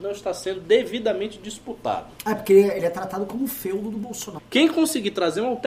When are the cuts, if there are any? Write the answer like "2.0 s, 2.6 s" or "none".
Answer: 2.1 s, 4.4 s